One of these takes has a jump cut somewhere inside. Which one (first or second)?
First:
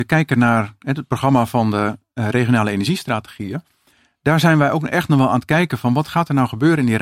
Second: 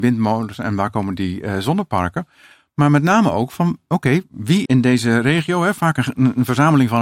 second